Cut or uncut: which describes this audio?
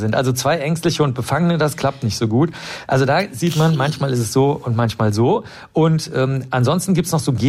uncut